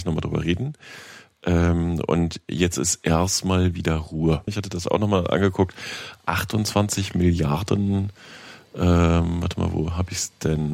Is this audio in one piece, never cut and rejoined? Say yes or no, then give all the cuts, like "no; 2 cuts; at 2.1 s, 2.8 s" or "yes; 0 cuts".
no; 1 cut; at 4.5 s